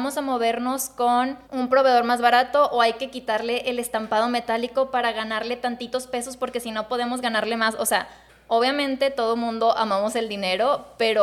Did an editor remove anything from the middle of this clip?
yes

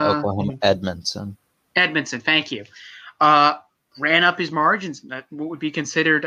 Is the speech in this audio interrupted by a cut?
no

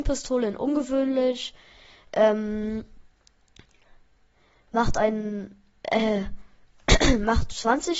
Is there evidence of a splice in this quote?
no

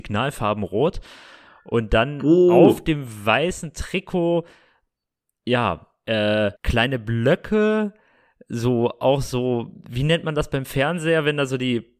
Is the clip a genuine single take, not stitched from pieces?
no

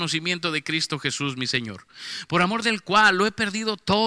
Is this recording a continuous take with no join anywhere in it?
yes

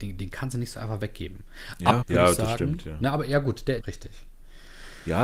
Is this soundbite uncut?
no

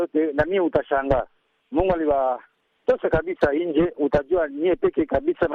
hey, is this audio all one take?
no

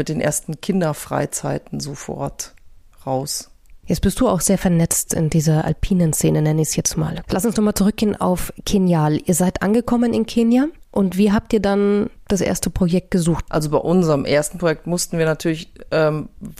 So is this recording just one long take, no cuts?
no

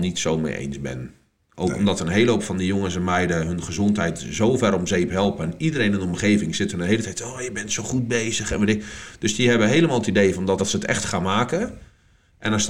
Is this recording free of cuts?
no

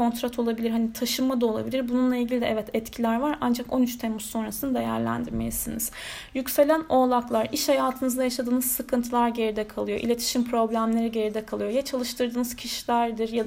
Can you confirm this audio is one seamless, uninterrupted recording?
yes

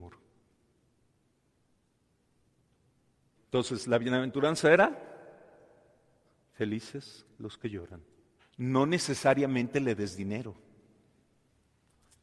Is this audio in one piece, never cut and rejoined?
no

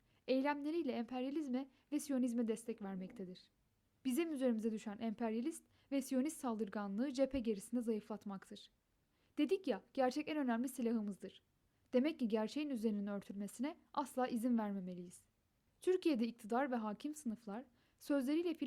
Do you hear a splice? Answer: yes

